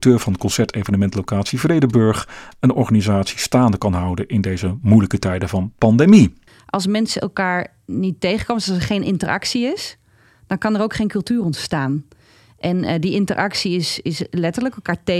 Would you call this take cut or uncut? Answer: uncut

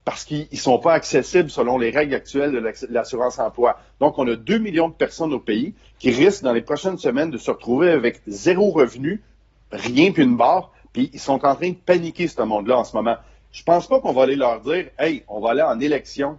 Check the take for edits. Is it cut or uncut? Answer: uncut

